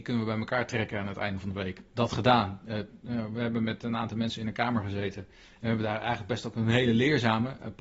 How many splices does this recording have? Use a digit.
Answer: 1